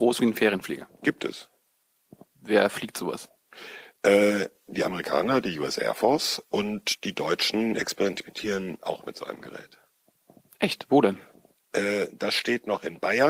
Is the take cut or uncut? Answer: uncut